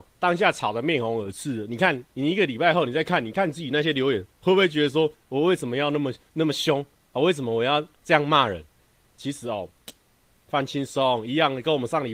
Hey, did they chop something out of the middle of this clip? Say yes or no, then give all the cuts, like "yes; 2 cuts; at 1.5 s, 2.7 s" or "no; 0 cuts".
yes; 1 cut; at 5.1 s